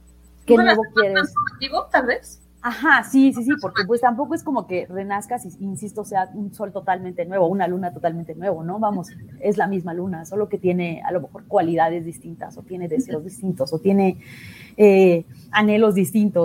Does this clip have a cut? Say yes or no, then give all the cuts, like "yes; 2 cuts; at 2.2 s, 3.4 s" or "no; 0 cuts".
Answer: no; 0 cuts